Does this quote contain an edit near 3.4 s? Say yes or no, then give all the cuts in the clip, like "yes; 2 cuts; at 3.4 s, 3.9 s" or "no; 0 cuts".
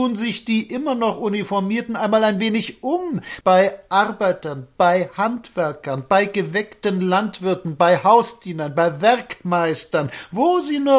yes; 1 cut; at 3.4 s